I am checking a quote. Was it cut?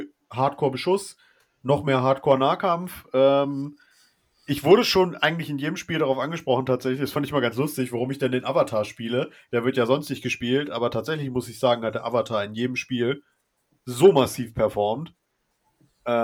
no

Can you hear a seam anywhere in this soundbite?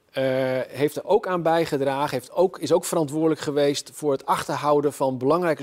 no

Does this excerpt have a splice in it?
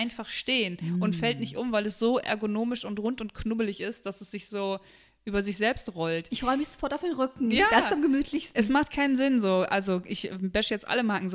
no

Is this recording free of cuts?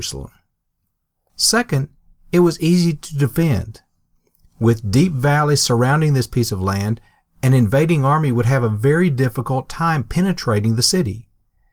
no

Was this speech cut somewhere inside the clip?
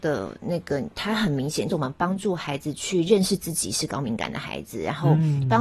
yes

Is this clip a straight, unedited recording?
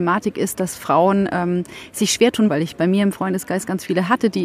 no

